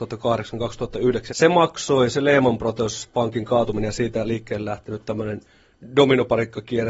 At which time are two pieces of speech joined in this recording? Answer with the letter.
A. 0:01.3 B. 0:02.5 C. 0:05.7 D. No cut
A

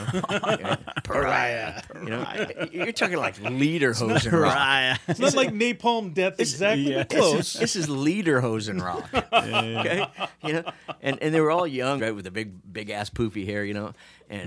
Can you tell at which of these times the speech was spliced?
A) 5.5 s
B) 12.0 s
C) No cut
B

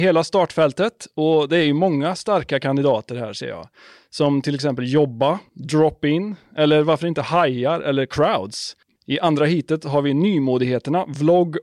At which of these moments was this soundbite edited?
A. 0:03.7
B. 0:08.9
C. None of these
B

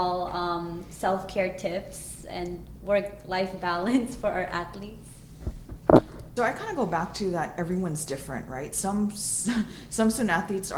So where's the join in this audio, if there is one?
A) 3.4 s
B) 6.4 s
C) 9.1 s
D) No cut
B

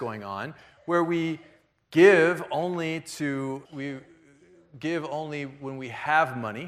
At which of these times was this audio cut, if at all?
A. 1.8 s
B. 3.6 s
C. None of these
B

